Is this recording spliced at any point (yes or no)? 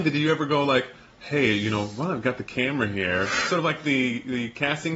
no